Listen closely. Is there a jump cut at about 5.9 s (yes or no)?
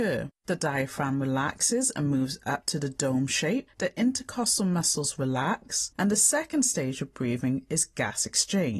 yes